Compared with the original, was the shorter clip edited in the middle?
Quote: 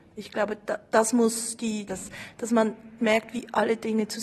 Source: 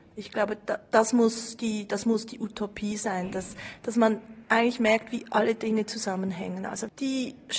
yes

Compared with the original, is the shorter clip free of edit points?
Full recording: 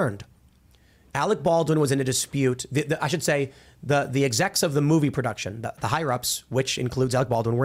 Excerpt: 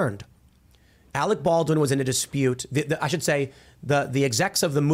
yes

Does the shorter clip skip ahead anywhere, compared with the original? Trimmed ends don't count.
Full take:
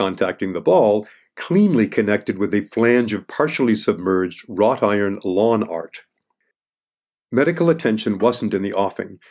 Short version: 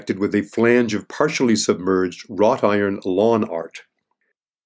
no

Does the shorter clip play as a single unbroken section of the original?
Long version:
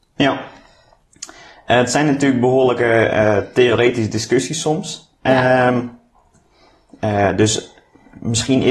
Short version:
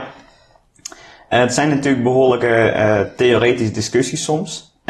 yes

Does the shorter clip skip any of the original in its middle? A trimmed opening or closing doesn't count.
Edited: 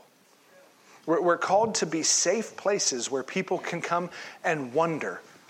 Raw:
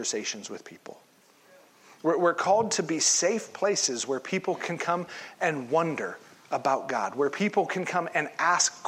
no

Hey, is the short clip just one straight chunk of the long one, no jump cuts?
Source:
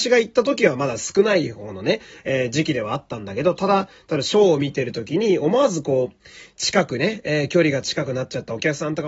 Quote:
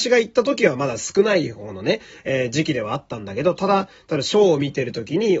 yes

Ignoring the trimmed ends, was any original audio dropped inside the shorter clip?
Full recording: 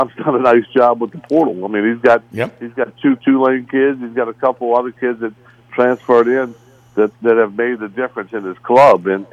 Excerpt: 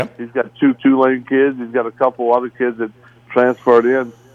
no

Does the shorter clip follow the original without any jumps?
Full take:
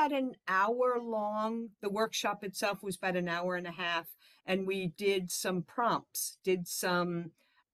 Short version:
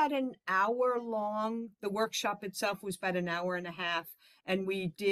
yes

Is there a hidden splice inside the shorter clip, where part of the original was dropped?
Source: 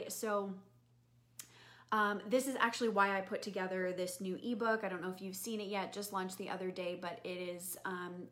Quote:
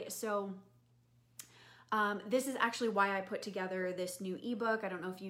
no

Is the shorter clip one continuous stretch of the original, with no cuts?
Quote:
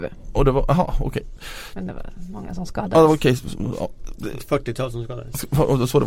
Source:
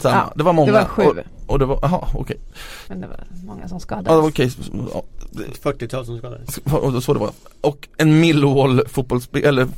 yes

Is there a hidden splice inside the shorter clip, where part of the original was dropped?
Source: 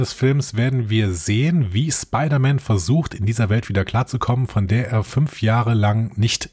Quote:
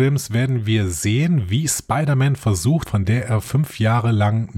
yes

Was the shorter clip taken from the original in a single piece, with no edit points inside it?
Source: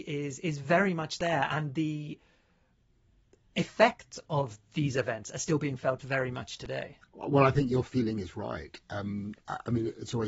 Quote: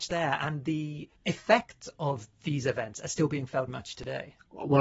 no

